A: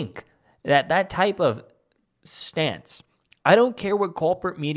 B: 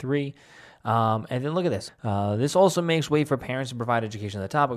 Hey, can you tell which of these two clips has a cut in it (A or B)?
B